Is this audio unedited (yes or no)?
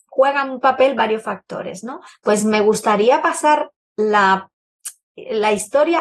no